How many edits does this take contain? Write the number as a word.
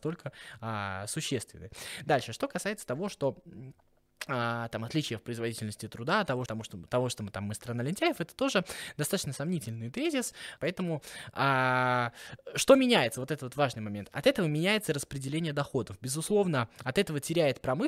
two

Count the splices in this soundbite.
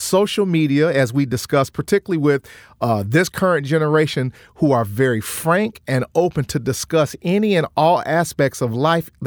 zero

